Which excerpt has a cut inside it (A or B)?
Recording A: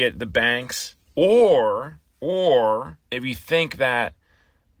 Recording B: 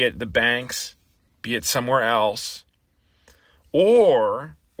A